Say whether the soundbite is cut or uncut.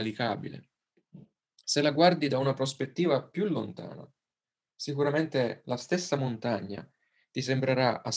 uncut